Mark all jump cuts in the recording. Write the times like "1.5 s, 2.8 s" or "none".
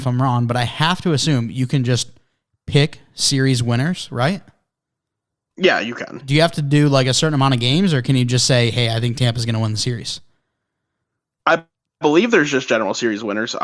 none